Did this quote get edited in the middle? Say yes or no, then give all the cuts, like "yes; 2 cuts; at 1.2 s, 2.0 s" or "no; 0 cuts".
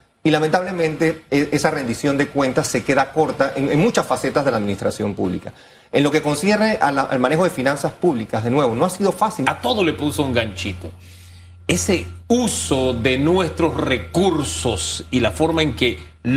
yes; 2 cuts; at 9.4 s, 12.3 s